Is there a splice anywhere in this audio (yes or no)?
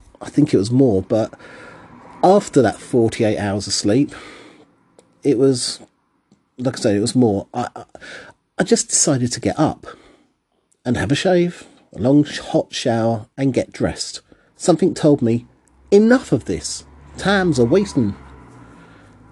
yes